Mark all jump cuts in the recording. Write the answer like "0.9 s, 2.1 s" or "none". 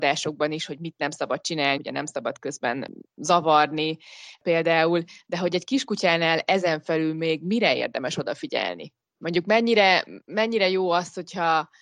1.8 s